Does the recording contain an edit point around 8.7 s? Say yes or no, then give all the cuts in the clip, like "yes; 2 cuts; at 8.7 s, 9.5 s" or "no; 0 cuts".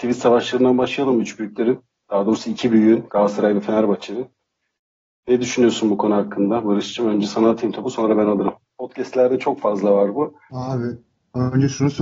yes; 2 cuts; at 8.7 s, 10.5 s